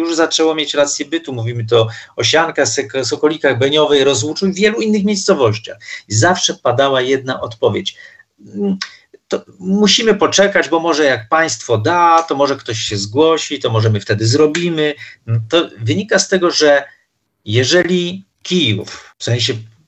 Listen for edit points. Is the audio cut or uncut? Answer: uncut